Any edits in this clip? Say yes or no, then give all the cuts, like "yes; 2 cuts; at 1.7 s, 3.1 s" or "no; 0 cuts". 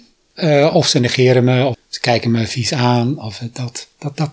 yes; 1 cut; at 1.7 s